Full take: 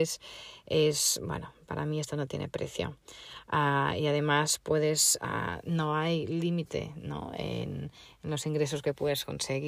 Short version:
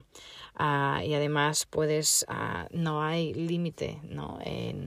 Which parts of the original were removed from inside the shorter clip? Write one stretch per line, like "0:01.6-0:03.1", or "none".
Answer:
none